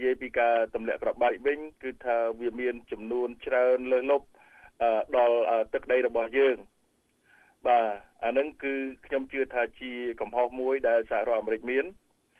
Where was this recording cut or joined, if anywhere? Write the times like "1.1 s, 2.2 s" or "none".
none

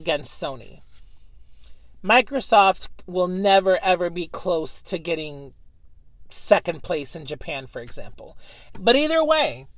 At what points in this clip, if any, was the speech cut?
8.7 s

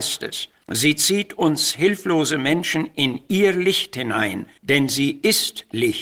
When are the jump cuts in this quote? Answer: none

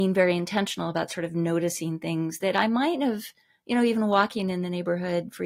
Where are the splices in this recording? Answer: none

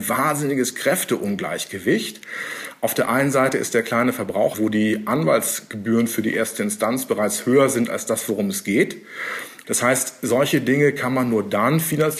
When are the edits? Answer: 4.5 s, 9.6 s

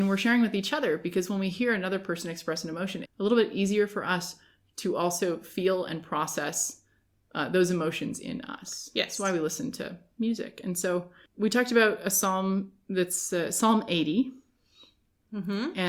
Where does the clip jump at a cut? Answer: 3.0 s

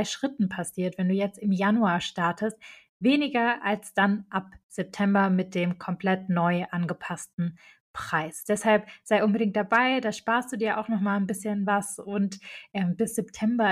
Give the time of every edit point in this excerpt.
none

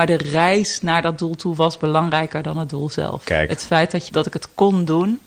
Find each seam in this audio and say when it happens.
4.1 s

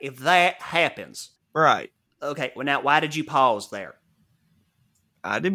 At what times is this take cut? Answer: 1.4 s

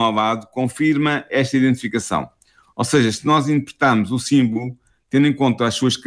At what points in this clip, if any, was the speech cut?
none

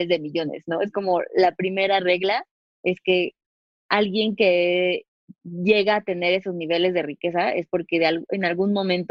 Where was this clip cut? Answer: none

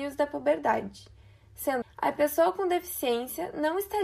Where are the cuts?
1.8 s

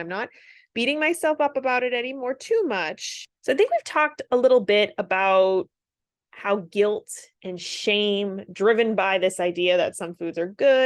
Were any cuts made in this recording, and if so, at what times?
3.4 s, 7.3 s

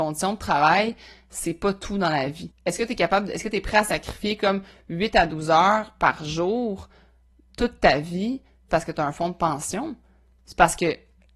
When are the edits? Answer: 2.5 s, 8.7 s

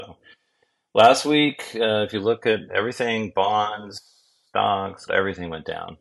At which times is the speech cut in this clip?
2.7 s, 5.1 s

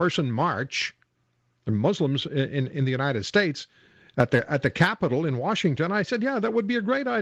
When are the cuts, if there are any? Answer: none

